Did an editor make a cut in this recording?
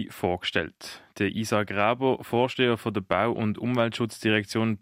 no; 0 cuts

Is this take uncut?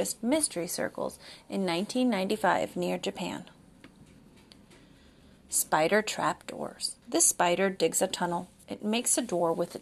no; 1 cut; at 7.0 s

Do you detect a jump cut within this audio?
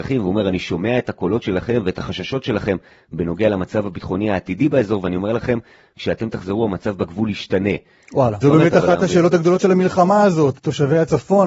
yes; 2 cuts; at 8.4 s, 10.5 s

